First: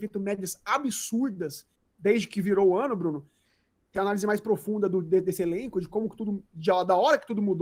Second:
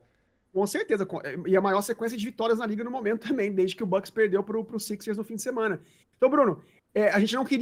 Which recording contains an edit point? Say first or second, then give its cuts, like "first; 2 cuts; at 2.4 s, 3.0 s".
first; 1 cut; at 3.8 s